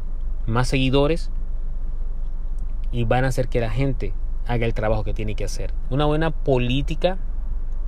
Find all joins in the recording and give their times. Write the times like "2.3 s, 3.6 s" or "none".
5.8 s

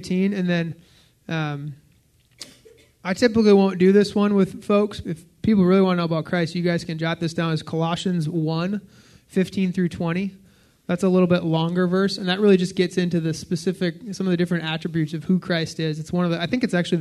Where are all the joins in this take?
5.0 s

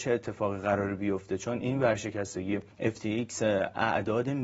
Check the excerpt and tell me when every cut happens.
2.7 s

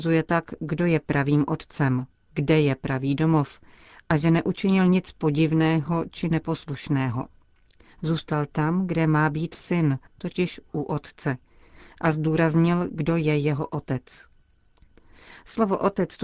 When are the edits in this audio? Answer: 10.1 s

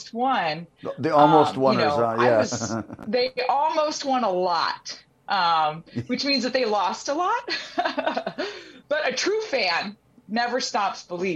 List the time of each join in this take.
none

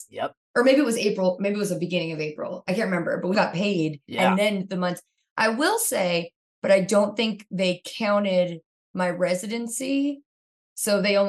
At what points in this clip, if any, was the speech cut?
3.3 s, 6.5 s

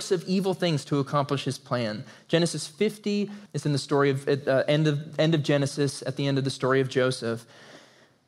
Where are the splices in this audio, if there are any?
3.5 s

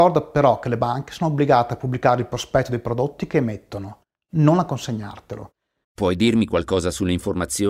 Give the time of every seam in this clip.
5.8 s

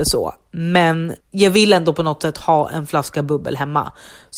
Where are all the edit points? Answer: 1.2 s

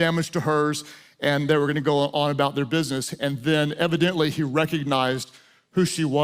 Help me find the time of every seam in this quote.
none

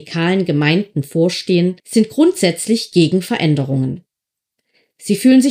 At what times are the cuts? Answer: 1.8 s

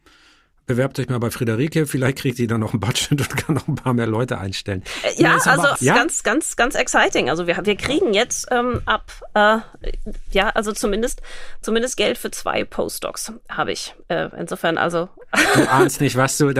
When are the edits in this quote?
5.8 s

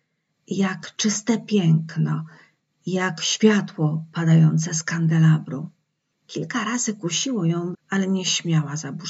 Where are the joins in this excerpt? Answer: 7.7 s

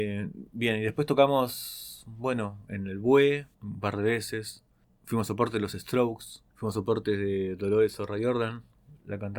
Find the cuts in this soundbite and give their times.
6.5 s

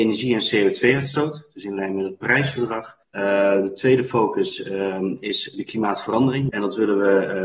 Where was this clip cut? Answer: 3.0 s, 6.5 s

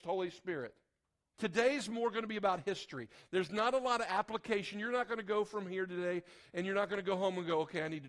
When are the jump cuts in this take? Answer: 1.3 s

